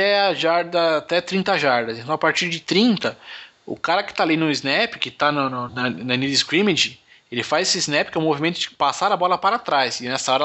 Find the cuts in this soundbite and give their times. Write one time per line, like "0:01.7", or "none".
0:05.7